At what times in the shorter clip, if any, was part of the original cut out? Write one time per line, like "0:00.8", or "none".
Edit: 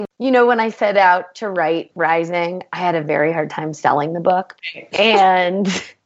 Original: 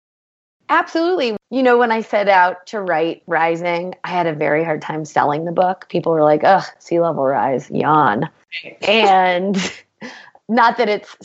0:04.6

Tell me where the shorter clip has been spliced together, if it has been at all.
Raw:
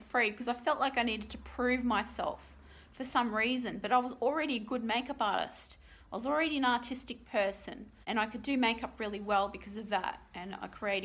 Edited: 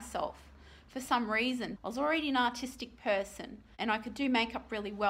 0:01.8

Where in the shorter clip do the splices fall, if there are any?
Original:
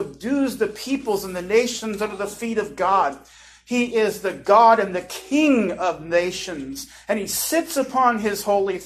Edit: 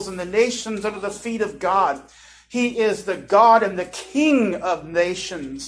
none

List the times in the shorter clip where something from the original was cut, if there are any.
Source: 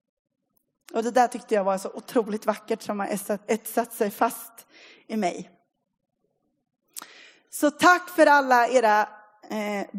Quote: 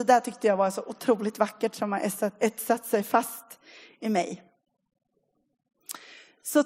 none

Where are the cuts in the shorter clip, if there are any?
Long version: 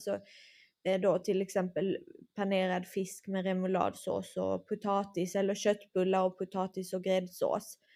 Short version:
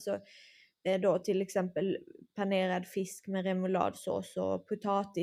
none

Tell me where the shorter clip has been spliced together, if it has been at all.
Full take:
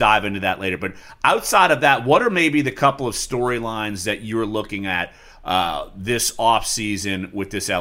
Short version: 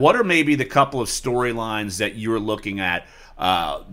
none

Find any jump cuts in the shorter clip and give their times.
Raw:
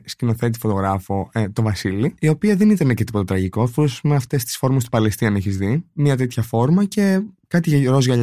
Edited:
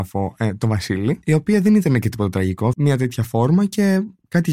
0:02.7

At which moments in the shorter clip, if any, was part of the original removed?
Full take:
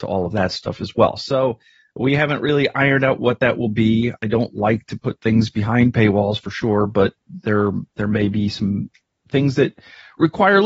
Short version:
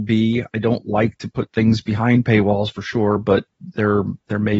none

